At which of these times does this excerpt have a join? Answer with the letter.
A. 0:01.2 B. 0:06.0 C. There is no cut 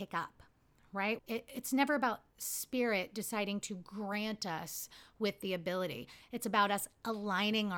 A